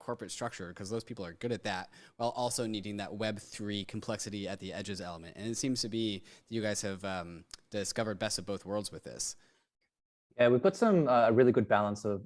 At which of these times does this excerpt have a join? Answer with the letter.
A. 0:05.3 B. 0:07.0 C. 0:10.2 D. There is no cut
D